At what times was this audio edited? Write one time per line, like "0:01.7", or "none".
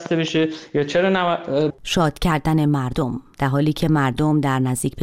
0:01.7